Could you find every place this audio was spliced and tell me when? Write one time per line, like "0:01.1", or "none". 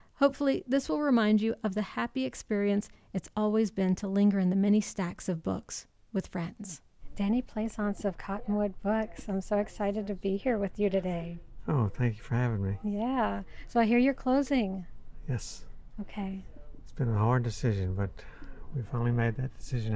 none